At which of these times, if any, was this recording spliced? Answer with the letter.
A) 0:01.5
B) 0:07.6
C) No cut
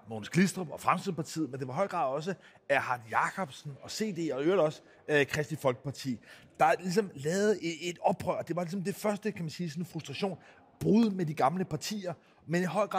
B